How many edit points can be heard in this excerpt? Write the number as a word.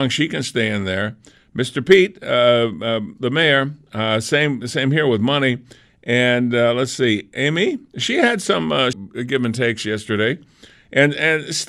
one